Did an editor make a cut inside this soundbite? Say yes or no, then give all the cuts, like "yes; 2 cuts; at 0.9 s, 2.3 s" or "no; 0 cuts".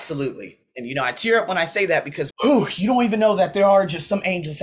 yes; 1 cut; at 2.3 s